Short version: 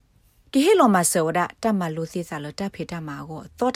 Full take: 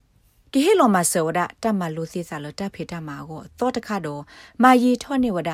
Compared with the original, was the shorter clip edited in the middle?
no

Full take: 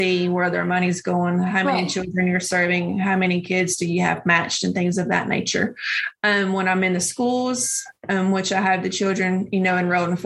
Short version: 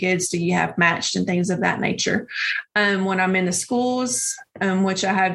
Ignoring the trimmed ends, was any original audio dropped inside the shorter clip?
no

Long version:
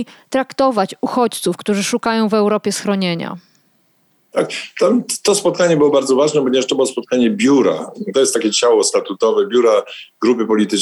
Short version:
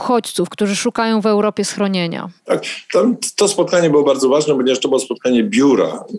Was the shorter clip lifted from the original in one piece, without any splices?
no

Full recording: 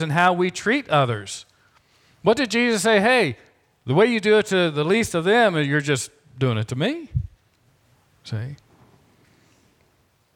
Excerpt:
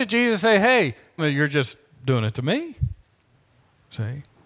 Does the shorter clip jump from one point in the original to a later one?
yes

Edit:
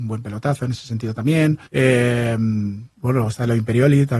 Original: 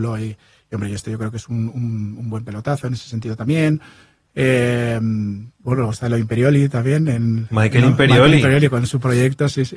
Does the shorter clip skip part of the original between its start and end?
yes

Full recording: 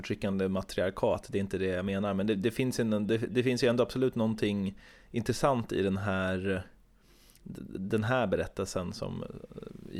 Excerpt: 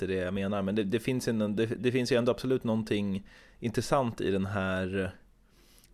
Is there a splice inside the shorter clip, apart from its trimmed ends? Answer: no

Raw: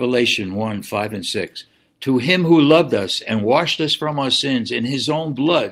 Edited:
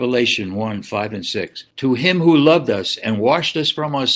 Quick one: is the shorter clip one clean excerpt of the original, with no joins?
no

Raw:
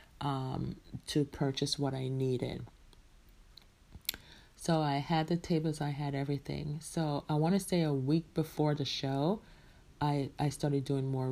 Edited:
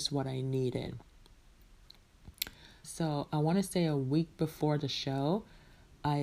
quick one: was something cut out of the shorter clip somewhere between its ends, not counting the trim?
yes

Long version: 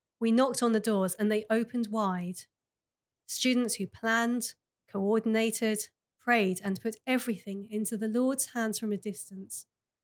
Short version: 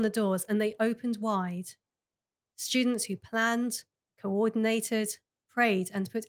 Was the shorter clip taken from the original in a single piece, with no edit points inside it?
yes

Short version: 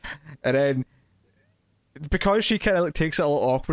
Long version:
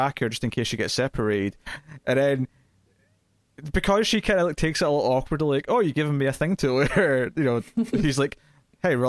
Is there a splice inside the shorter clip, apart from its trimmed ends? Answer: no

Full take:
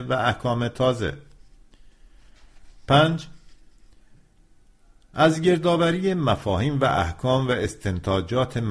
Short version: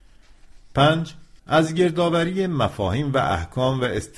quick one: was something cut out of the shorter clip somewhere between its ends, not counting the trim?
yes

